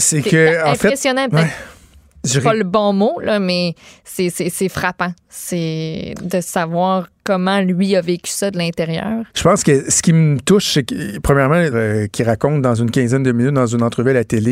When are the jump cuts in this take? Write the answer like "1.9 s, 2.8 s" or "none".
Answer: 9.3 s, 11.7 s